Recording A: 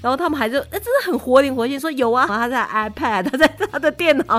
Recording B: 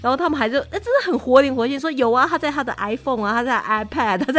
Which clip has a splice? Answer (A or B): A